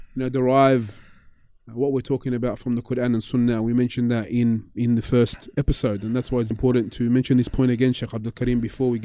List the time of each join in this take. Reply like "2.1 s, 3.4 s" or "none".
6.5 s